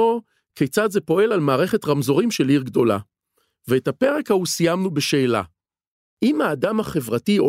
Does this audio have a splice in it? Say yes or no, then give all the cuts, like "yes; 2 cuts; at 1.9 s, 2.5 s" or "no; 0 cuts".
no; 0 cuts